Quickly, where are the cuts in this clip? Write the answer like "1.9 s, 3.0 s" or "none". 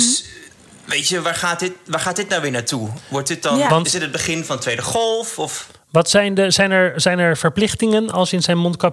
none